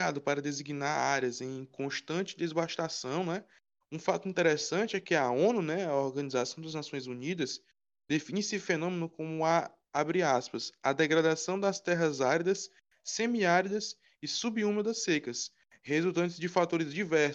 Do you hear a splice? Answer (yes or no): yes